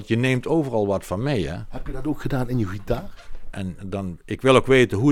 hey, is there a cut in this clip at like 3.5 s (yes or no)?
yes